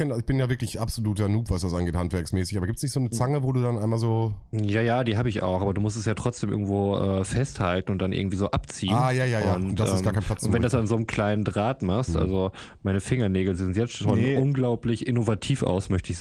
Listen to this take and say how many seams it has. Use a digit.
0